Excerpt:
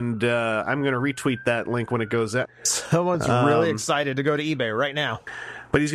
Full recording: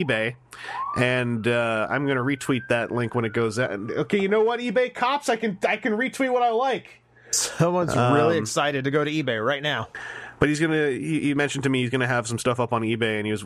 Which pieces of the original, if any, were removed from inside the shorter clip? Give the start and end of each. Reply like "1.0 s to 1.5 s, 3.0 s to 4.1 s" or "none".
3.7 s to 7.1 s